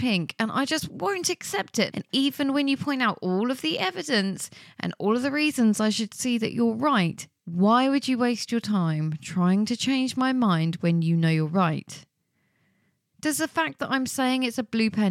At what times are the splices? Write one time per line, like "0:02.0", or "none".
0:01.9
0:07.4

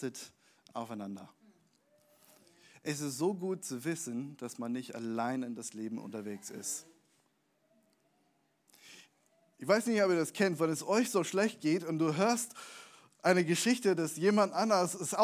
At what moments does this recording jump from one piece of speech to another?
none

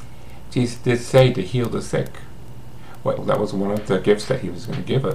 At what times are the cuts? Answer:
0:03.2

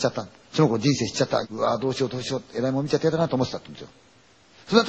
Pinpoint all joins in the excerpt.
0:01.4

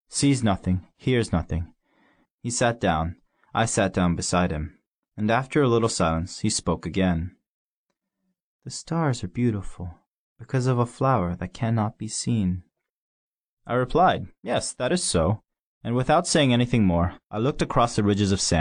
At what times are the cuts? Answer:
0:02.3

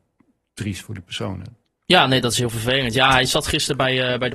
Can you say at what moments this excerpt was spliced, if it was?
none

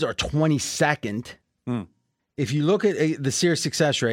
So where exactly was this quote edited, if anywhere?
0:02.2

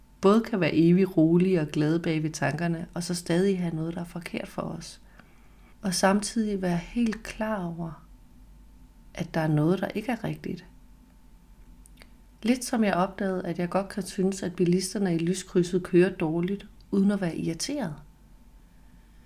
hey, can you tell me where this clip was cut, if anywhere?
0:05.7

